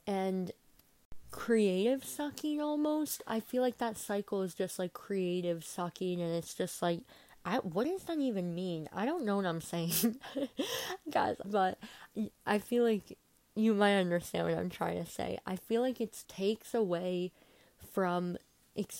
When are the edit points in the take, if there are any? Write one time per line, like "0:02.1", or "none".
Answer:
0:11.4
0:16.2